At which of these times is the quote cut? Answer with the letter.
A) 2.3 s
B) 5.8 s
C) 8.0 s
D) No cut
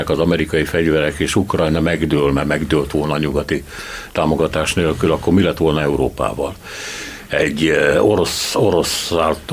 D